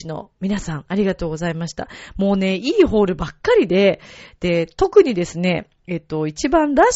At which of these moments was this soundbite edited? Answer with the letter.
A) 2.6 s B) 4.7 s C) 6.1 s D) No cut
D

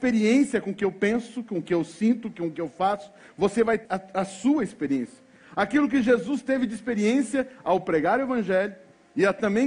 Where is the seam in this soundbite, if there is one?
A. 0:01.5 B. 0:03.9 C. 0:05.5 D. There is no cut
B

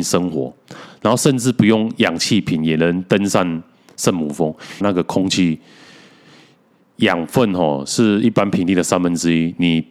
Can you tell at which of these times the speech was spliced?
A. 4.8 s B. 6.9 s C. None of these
A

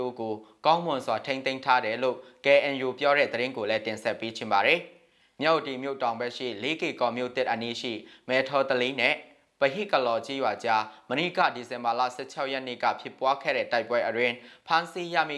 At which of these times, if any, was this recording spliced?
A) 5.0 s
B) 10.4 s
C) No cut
C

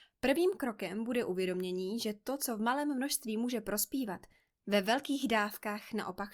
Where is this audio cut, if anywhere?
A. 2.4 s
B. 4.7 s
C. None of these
C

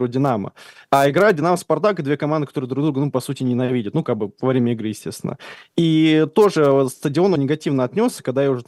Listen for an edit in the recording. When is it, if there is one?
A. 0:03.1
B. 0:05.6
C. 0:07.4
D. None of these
C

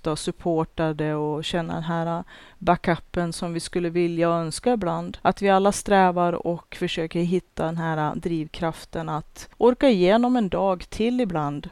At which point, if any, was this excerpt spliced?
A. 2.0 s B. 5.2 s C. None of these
B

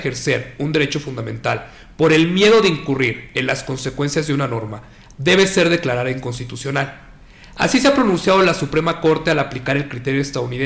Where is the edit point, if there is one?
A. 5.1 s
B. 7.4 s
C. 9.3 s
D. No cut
A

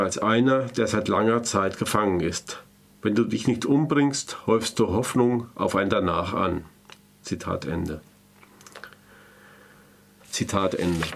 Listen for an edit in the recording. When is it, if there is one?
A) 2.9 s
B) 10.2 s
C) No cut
B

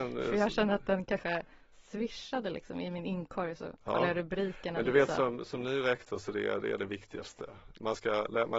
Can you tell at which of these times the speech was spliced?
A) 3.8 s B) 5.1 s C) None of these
C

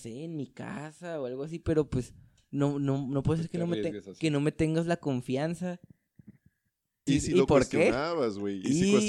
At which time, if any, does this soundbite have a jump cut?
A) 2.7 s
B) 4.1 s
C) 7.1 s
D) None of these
C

